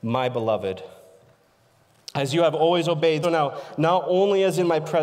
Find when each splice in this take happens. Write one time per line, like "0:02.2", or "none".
0:03.2

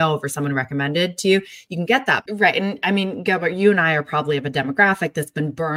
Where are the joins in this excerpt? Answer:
0:02.3

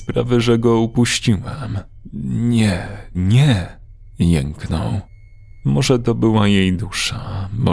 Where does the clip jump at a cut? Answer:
0:03.1
0:05.6

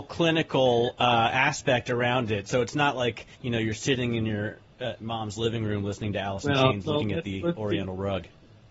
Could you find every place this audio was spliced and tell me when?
0:03.3

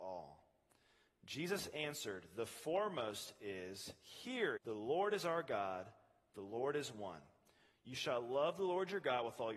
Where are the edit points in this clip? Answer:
0:04.6

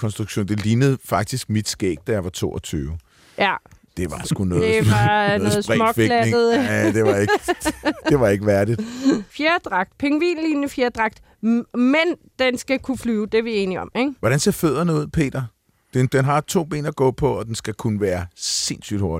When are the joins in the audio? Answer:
0:16.1

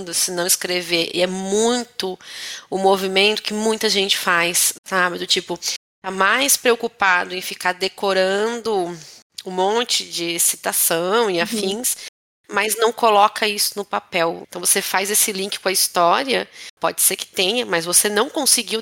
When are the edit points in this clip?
0:14.4
0:16.8

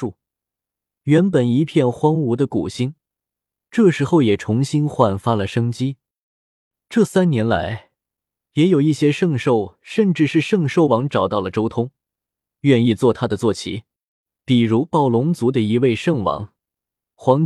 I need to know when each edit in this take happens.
none

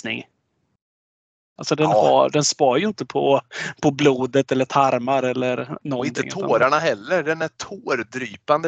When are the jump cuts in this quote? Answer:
0:01.6

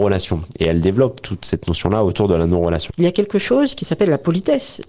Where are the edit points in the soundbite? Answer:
0:02.9

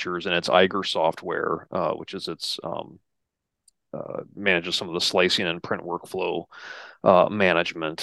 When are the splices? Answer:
none

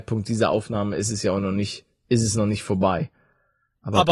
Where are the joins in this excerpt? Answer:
none

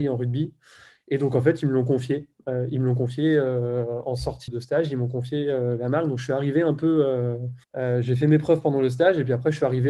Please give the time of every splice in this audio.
0:04.5
0:07.6

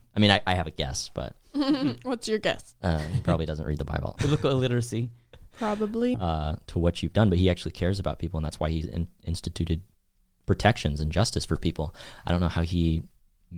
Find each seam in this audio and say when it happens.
0:06.1

